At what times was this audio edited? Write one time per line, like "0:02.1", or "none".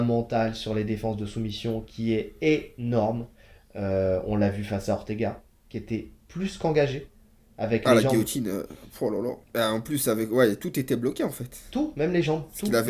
0:05.5
0:09.4